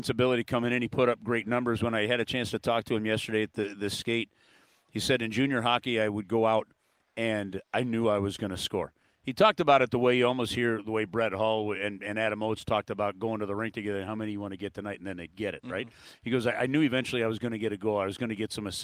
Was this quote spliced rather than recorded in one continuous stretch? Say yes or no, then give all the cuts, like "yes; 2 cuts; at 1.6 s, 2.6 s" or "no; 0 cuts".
no; 0 cuts